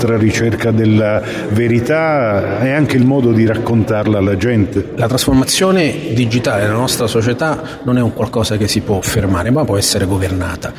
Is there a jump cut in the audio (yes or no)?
no